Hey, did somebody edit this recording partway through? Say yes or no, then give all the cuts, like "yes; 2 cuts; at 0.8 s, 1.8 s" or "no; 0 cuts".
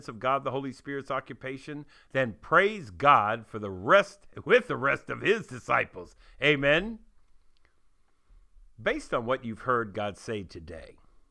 no; 0 cuts